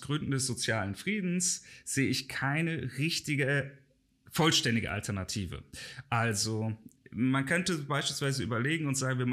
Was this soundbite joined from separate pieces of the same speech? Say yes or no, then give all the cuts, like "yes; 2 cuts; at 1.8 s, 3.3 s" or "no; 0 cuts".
no; 0 cuts